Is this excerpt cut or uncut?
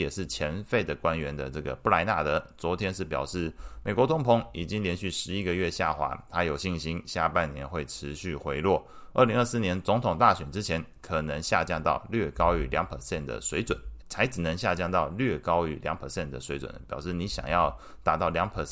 cut